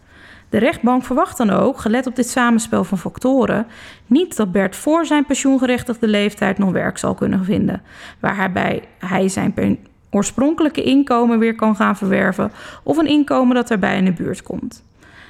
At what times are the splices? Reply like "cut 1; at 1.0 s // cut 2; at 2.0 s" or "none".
none